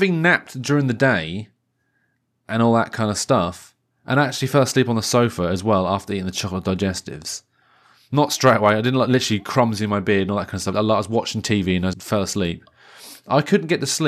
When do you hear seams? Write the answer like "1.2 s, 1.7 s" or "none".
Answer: 10.7 s, 11.9 s